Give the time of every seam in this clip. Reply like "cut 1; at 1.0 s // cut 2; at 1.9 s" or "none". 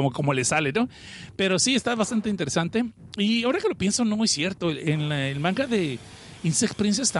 none